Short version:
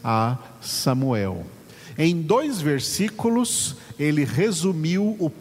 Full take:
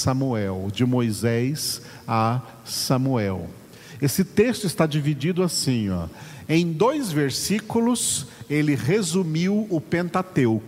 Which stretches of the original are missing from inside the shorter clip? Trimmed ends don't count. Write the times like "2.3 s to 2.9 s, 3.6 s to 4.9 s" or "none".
4.0 s to 6.5 s